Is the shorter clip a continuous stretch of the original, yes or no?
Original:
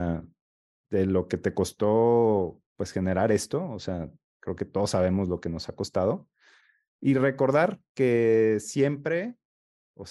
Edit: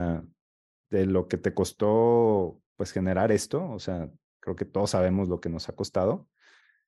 yes